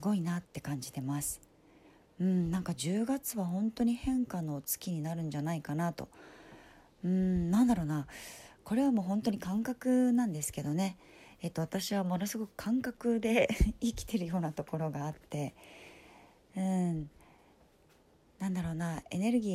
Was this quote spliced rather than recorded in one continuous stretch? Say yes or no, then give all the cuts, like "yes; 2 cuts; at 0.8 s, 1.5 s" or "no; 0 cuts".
no; 0 cuts